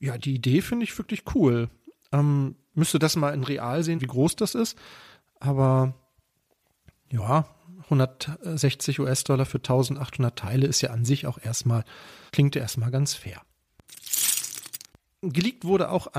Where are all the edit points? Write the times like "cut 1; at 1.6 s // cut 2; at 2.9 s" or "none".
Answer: cut 1; at 4.0 s // cut 2; at 12.3 s